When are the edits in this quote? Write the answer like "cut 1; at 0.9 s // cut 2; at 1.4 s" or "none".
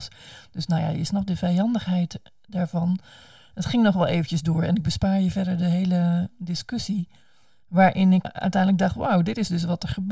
cut 1; at 8.2 s